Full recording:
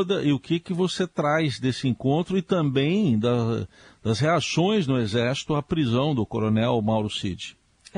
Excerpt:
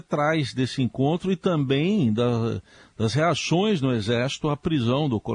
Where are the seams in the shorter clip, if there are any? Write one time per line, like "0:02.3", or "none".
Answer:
none